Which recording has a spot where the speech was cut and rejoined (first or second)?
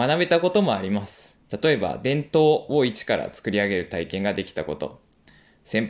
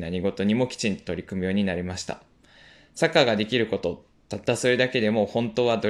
first